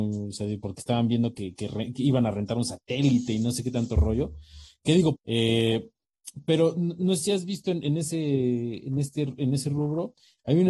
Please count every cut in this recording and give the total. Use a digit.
1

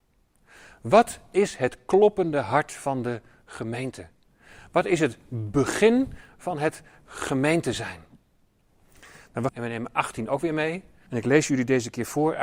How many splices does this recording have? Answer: 2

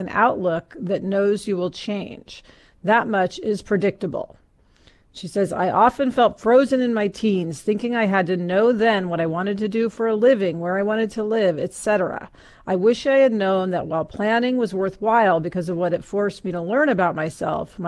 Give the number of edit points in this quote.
0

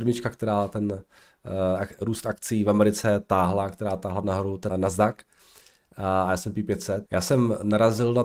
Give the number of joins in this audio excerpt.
2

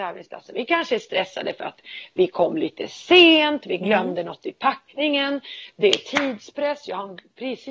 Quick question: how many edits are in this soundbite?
0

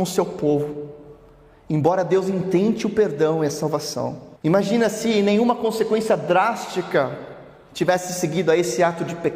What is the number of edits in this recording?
1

